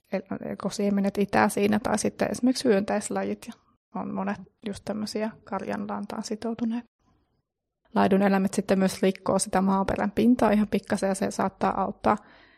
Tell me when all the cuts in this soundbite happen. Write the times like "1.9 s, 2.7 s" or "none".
7.8 s